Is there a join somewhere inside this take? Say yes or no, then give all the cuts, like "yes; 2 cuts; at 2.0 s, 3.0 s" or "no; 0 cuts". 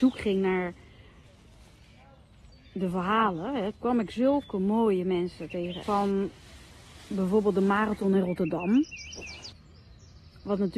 yes; 2 cuts; at 3.7 s, 5.8 s